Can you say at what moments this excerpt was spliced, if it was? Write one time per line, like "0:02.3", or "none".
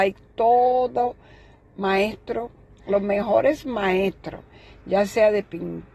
none